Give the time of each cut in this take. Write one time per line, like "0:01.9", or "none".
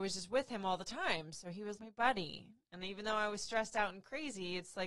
0:01.8